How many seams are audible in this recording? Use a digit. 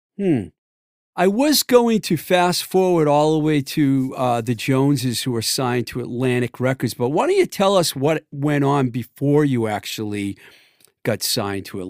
0